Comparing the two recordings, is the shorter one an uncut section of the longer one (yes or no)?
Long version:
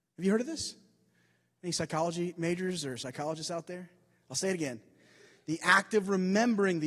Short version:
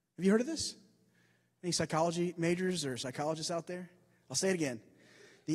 yes